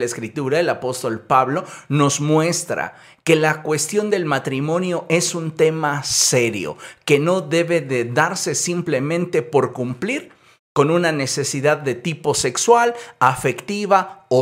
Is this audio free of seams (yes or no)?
yes